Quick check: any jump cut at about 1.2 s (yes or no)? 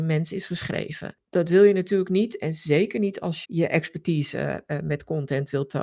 no